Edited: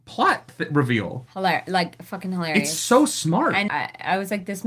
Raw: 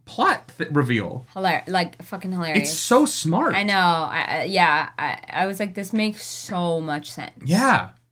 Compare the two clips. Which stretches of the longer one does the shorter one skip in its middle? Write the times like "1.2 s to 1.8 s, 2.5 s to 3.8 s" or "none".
3.7 s to 5.0 s